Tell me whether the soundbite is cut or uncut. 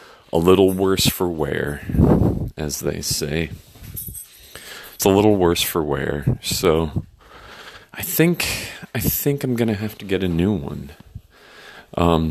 cut